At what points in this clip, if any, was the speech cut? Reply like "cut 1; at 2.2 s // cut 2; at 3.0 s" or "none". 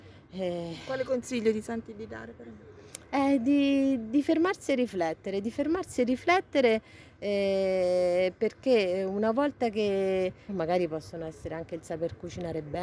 cut 1; at 10.5 s